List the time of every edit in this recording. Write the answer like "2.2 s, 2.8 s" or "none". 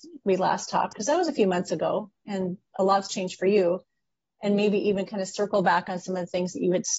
none